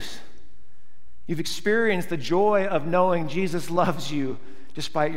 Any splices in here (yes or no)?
no